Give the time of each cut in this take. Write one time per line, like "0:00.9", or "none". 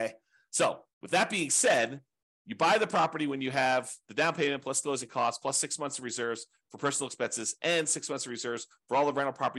0:00.9

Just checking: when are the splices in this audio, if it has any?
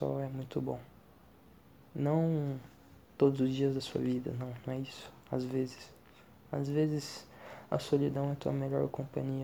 none

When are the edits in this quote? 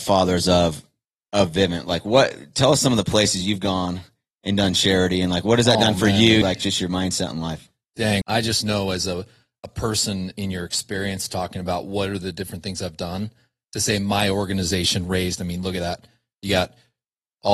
0:06.4
0:08.2

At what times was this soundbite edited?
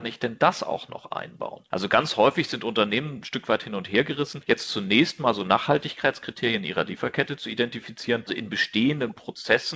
0:08.3

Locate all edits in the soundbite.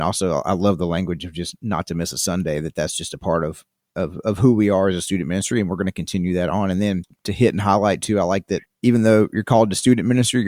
none

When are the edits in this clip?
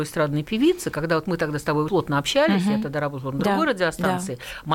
0:01.9

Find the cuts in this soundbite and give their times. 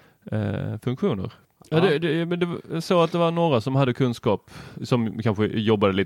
0:01.6

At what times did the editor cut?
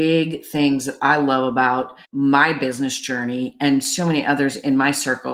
0:02.0

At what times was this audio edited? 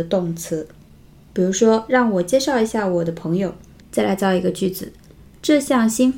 0:01.1
0:03.8

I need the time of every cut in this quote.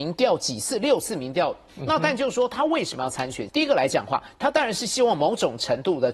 0:01.7
0:03.5

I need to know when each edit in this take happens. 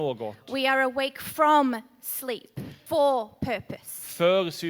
0:02.9

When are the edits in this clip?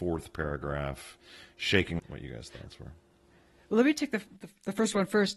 0:02.0

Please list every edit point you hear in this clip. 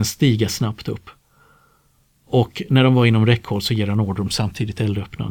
none

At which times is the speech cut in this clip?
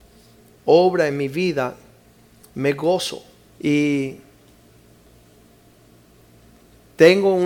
0:03.5

